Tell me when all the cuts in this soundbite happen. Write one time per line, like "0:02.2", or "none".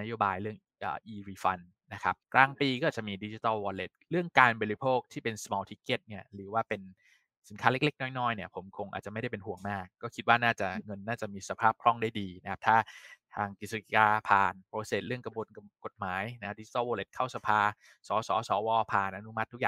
0:02.2